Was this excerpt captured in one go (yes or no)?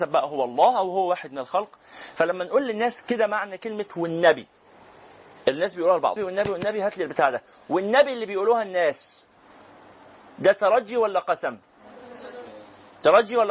no